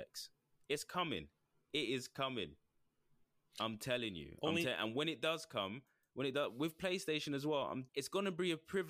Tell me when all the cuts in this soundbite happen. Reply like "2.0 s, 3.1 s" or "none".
7.9 s